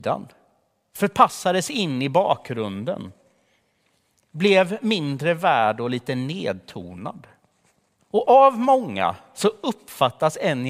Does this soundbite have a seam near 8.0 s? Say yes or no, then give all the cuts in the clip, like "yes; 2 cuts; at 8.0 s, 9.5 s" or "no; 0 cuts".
yes; 1 cut; at 8.0 s